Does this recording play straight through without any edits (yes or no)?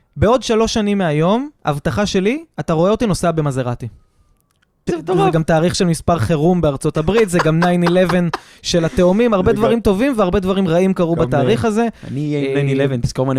no